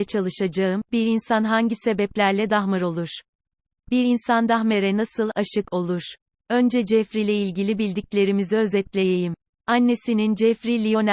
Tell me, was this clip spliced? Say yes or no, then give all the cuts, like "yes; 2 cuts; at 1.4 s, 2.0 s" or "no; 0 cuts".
no; 0 cuts